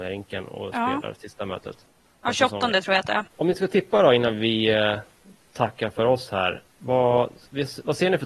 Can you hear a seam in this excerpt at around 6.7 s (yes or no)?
no